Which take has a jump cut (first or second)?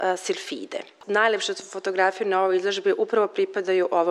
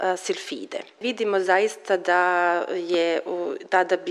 second